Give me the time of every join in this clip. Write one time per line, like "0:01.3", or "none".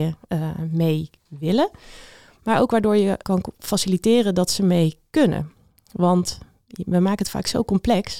0:03.2

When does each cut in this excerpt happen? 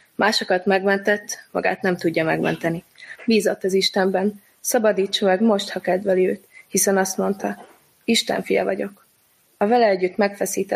0:03.2

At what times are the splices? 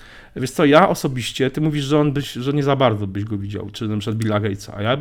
none

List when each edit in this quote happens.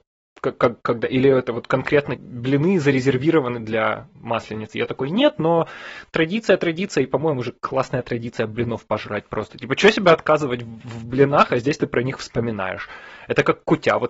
0:02.2

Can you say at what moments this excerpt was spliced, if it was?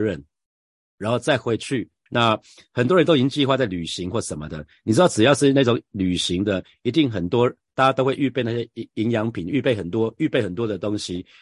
0:02.1

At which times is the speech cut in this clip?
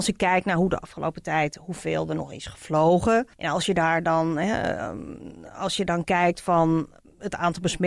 0:03.3

